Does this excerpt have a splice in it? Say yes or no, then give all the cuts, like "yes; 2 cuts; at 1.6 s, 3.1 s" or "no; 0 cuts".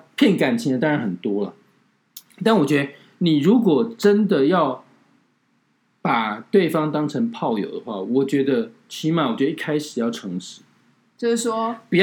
no; 0 cuts